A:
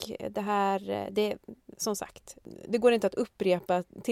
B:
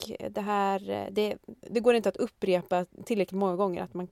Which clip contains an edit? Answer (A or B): B